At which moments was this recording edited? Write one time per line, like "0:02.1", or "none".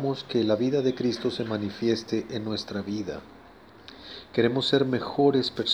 none